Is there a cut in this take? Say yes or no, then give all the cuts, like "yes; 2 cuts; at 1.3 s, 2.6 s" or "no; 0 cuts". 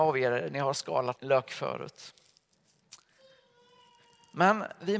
yes; 1 cut; at 1.2 s